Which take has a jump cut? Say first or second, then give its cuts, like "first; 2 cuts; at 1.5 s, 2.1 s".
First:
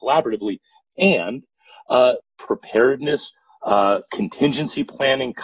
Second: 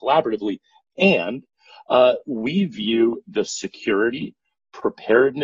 first; 2 cuts; at 2.2 s, 4.1 s